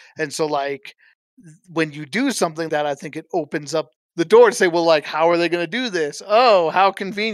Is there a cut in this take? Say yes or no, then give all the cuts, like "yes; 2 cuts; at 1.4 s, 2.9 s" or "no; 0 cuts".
yes; 2 cuts; at 2.7 s, 4.0 s